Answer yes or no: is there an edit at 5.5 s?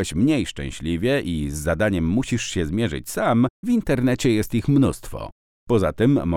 no